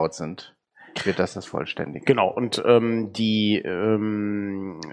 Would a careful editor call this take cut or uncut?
uncut